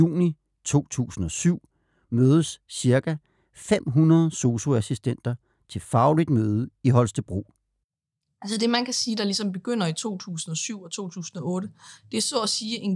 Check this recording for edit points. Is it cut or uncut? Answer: uncut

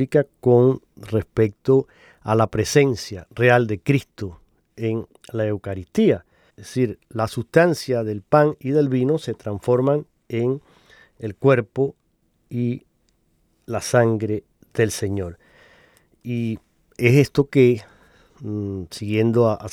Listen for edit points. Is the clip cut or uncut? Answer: cut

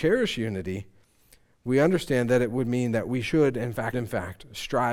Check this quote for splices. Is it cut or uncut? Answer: cut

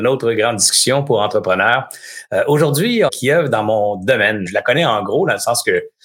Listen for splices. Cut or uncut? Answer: cut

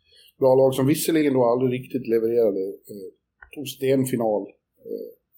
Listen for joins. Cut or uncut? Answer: uncut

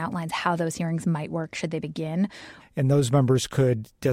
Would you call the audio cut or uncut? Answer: cut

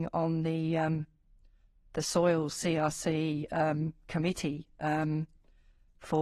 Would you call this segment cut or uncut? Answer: uncut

